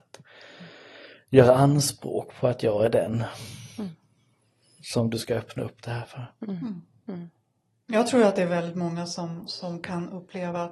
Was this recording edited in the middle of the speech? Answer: no; 0 cuts

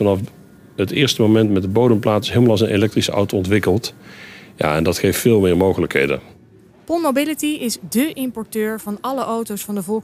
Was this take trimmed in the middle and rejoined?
no; 0 cuts

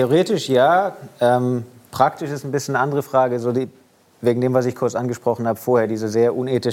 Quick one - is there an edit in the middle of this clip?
no; 0 cuts

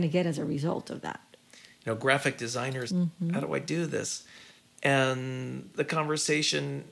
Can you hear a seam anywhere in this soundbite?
yes; 1 cut; at 2.9 s

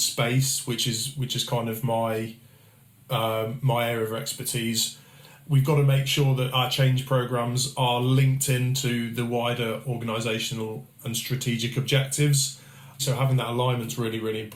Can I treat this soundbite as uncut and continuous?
no; 1 cut; at 13.0 s

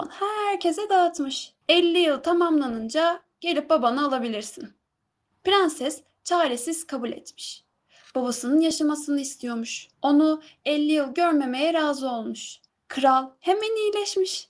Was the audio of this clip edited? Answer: yes; 3 cuts; at 1.6 s, 9.9 s, 12.7 s

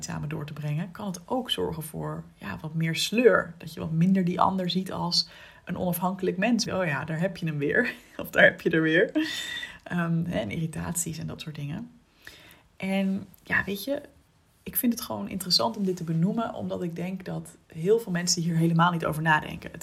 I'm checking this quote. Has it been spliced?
yes; 2 cuts; at 6.7 s, 13.3 s

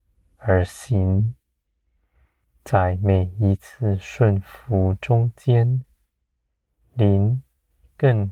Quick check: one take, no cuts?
yes; 0 cuts

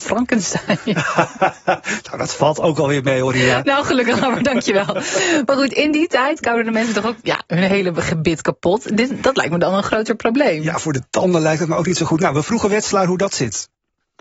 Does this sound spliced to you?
no; 0 cuts

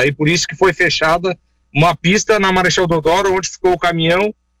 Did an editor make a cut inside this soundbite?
no; 0 cuts

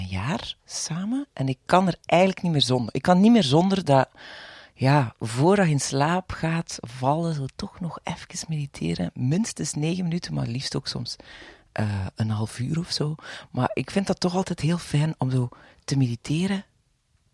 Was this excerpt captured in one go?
yes; 0 cuts

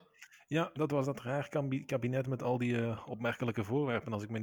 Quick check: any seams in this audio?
no; 0 cuts

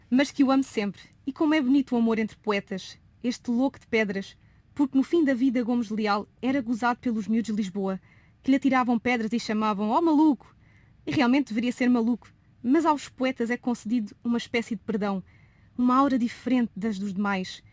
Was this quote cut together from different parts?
no; 0 cuts

